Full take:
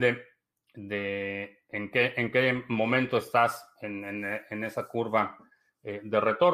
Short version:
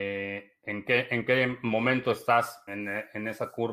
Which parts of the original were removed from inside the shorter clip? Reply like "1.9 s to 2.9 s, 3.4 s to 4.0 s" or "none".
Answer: 3.7 s to 4.0 s